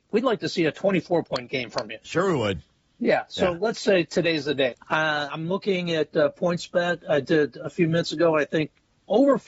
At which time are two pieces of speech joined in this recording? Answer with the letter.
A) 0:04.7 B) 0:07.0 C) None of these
A